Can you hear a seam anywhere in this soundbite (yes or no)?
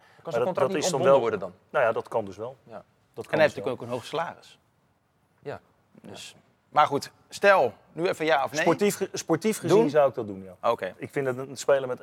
no